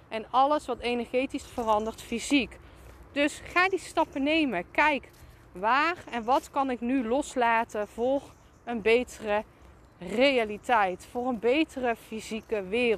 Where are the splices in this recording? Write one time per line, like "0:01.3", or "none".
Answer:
0:01.4